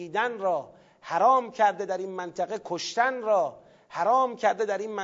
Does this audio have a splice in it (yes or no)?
no